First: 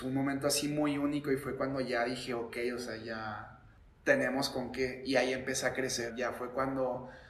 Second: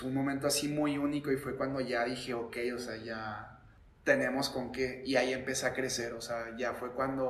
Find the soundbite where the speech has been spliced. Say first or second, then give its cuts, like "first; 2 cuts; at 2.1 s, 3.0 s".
first; 1 cut; at 6.1 s